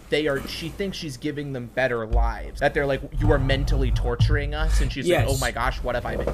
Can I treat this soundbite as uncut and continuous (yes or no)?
no